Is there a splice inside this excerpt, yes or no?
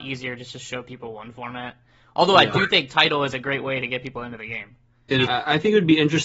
yes